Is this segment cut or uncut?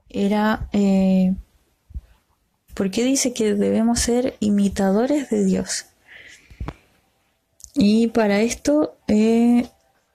cut